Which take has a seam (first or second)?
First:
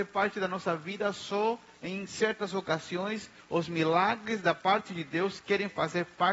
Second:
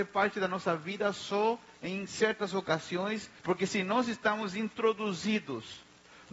second